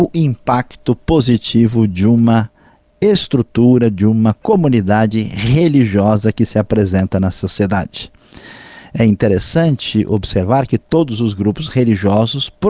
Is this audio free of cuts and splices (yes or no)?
yes